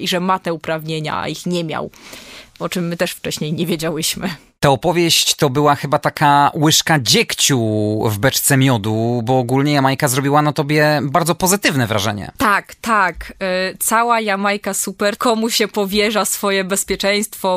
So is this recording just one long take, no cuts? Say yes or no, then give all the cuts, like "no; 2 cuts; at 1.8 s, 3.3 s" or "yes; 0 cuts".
no; 1 cut; at 15.2 s